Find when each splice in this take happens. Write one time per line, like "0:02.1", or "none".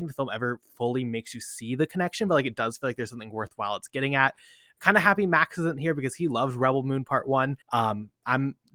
0:07.6

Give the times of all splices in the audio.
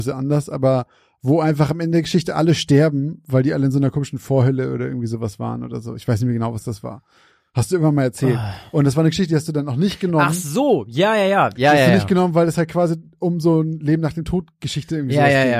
none

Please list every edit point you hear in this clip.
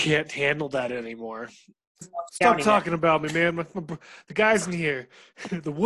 0:02.0

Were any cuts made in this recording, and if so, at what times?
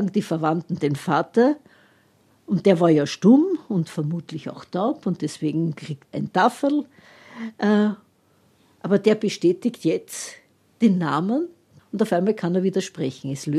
0:06.1
0:11.8

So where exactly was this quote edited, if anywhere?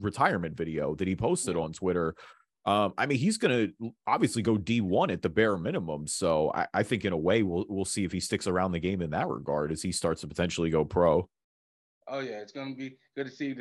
none

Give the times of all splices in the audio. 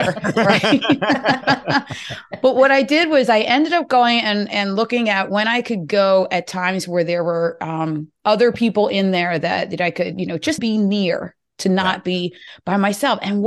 0:10.6

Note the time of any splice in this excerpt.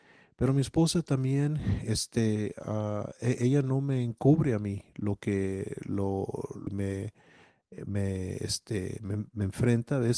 0:06.7

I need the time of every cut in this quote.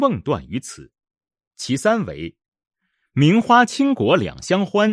0:01.5

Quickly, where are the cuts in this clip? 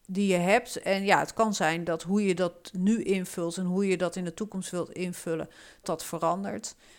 0:05.8

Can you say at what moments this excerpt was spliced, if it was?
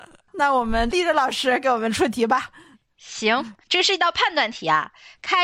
none

